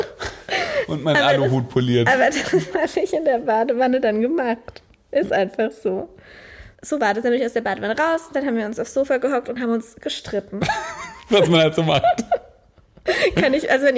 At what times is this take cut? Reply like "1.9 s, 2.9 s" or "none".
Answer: 6.8 s